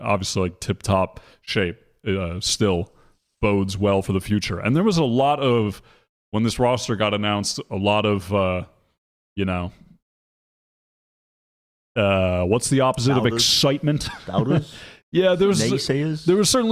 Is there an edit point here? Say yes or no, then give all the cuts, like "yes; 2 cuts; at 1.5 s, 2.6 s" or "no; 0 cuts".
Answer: no; 0 cuts